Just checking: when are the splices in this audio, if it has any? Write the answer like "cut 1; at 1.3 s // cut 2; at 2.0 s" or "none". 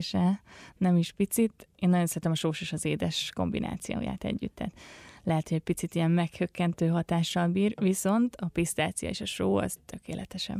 none

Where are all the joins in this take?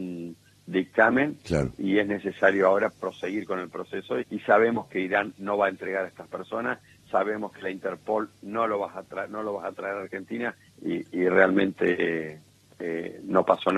cut 1; at 4.2 s // cut 2; at 10.7 s

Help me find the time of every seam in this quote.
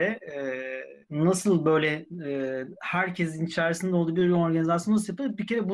none

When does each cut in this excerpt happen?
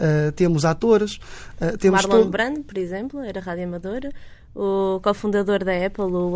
none

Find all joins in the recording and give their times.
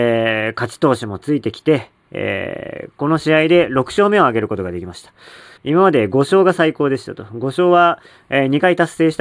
cut 1; at 5.6 s

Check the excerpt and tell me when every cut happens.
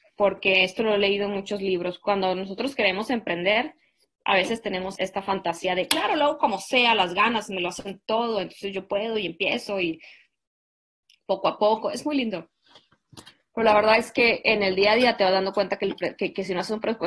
cut 1; at 5.0 s

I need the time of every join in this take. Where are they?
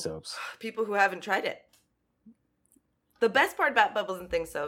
cut 1; at 3.0 s

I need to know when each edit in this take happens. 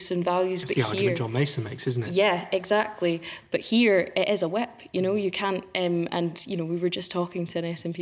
none

